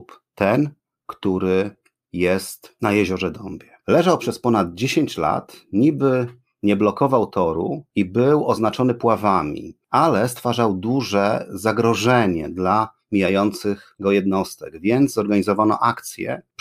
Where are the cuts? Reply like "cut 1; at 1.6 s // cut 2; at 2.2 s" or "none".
cut 1; at 3.8 s